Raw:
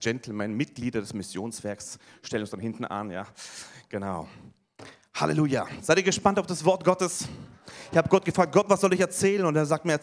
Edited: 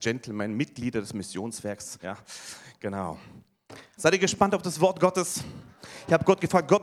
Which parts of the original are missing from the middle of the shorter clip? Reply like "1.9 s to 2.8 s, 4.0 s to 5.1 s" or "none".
2.0 s to 3.1 s, 5.1 s to 5.8 s

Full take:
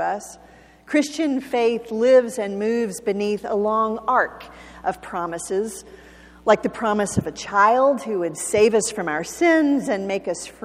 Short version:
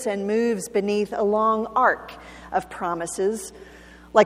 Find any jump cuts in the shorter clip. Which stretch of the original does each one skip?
none

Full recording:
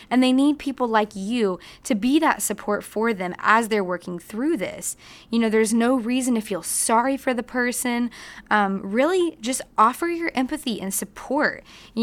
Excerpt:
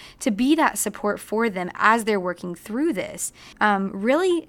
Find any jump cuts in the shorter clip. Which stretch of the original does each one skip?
5.2 s to 8.4 s

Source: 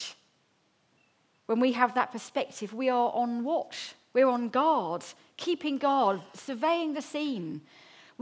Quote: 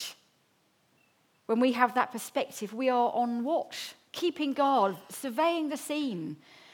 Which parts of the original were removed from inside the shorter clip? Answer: 4.1 s to 5.3 s

